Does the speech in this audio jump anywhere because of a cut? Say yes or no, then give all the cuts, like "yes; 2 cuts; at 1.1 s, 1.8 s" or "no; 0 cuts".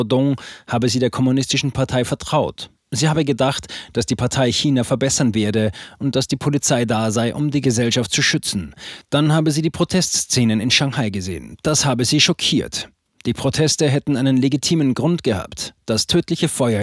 no; 0 cuts